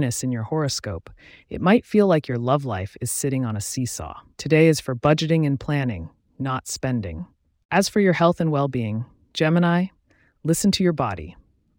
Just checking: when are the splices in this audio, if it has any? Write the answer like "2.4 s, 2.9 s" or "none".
4.3 s, 7.6 s

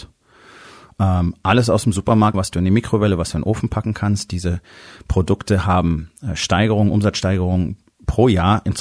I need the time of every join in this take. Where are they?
2.3 s

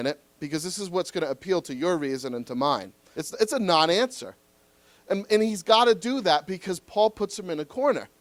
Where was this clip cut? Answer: 3.1 s

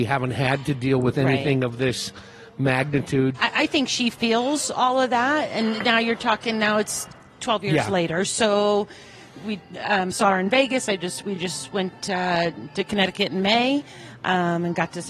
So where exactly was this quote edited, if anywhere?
none

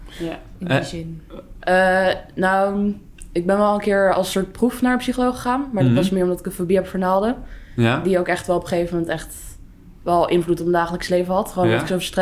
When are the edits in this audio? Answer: 1.6 s

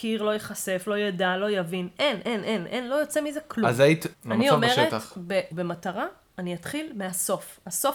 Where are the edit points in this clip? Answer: 4.1 s, 5.5 s

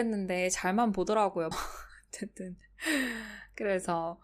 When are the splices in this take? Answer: 1.5 s

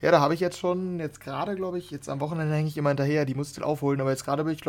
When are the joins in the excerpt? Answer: none

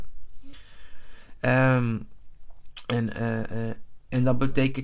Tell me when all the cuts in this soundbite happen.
none

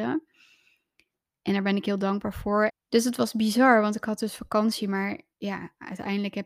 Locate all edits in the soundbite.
2.7 s

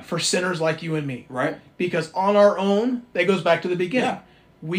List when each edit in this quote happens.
none

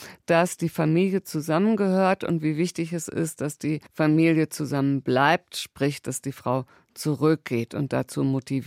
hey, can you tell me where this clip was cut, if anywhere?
none

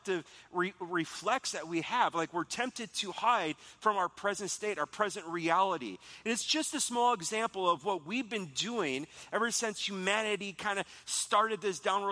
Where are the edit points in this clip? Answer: none

